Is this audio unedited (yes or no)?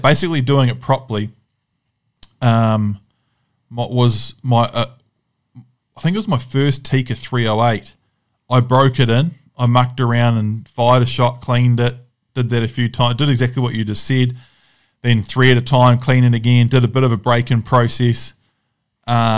yes